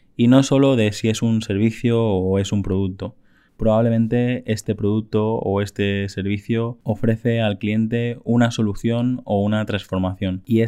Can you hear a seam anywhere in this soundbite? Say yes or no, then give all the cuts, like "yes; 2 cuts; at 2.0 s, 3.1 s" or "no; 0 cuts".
no; 0 cuts